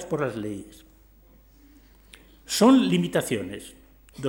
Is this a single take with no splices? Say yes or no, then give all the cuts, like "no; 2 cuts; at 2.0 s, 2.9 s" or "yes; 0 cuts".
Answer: yes; 0 cuts